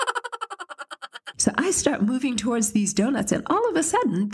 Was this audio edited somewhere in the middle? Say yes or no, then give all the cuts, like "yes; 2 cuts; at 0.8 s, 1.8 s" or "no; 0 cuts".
yes; 1 cut; at 1.4 s